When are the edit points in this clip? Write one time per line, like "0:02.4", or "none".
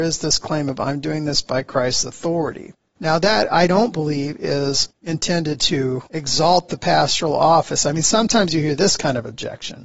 none